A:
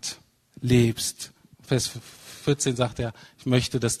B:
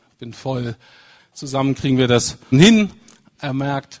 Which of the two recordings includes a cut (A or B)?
B